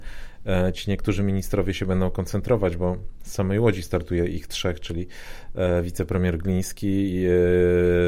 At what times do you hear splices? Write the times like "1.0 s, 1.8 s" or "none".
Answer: none